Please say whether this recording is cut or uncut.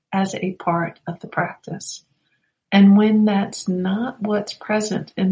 cut